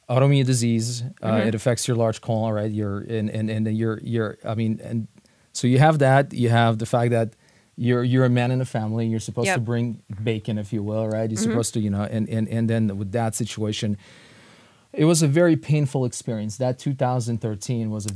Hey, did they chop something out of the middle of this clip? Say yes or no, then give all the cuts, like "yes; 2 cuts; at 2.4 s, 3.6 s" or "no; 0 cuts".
no; 0 cuts